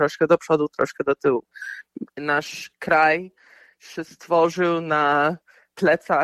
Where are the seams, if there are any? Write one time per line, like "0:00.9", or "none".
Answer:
0:02.1